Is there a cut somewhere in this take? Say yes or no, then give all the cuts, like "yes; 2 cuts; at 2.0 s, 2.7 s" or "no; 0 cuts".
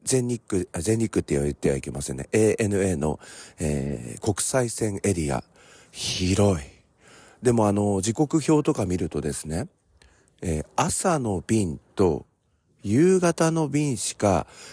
no; 0 cuts